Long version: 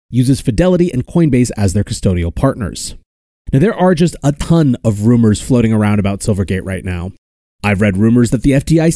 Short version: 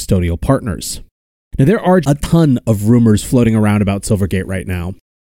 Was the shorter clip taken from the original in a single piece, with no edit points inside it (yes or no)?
no